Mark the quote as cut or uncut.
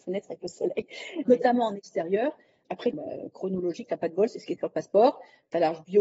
cut